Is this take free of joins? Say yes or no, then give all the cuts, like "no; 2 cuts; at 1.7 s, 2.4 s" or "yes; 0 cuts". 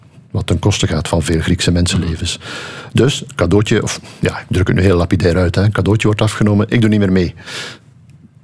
yes; 0 cuts